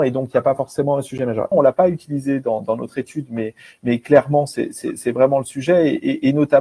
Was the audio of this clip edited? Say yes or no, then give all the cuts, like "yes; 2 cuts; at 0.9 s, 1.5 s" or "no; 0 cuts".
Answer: yes; 1 cut; at 1.5 s